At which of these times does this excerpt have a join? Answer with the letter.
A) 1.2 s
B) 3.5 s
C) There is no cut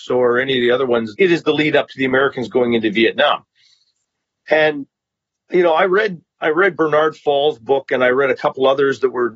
A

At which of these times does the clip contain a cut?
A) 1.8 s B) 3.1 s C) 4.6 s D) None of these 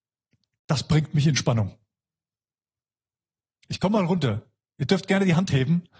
D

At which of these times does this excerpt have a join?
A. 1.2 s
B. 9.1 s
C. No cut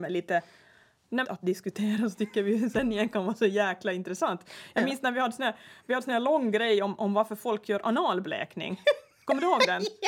A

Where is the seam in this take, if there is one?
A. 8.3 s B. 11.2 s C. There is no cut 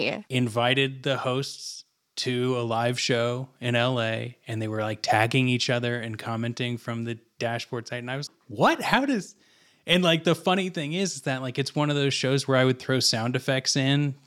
A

